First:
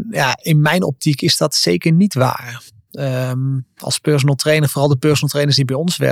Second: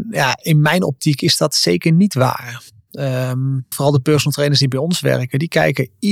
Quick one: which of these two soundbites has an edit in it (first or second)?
second